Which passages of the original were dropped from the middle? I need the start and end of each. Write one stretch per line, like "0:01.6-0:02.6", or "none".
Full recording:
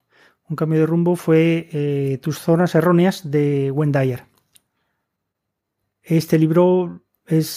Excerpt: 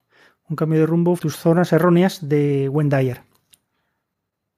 0:01.2-0:02.2